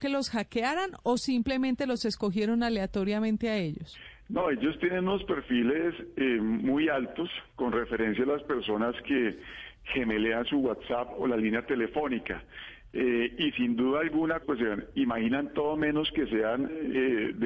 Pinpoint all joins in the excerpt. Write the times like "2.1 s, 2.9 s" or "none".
14.4 s